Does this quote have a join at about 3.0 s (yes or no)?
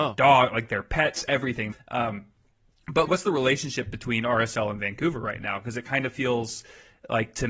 yes